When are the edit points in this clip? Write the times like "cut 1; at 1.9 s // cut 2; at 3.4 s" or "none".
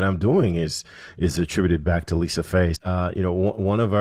cut 1; at 2.8 s